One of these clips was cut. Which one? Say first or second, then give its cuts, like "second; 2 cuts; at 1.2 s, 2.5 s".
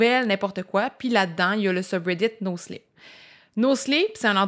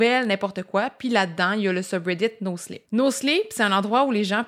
second; 1 cut; at 2.9 s